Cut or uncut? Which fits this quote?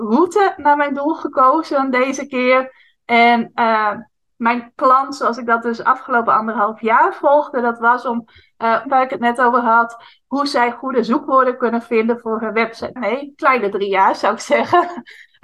cut